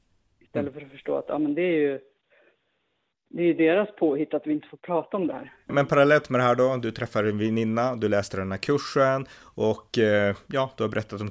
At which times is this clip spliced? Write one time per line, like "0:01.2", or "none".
0:05.7